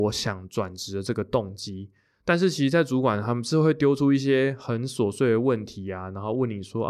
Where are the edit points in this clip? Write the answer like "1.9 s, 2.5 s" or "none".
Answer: 2.2 s